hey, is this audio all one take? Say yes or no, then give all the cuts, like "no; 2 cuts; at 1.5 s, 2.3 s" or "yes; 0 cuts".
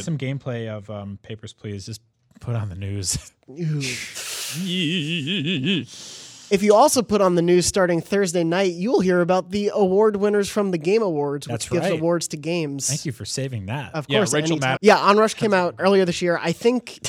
no; 2 cuts; at 14.8 s, 15.8 s